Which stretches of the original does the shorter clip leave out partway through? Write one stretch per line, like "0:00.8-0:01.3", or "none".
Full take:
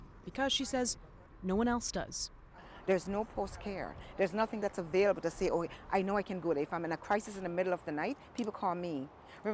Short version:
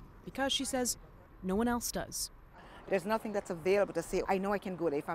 0:02.9-0:04.1
0:05.5-0:05.9